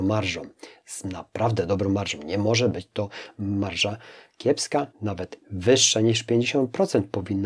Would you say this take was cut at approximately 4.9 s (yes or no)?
yes